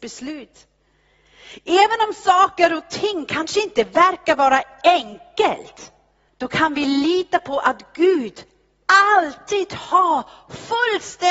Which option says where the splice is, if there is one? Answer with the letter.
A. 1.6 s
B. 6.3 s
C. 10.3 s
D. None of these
B